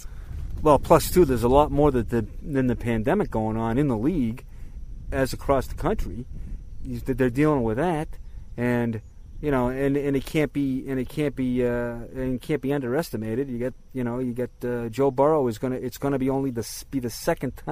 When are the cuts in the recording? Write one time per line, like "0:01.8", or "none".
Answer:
none